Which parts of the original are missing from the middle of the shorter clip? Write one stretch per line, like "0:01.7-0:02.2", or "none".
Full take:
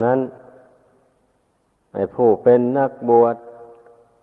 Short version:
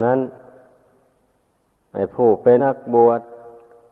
0:02.6-0:02.7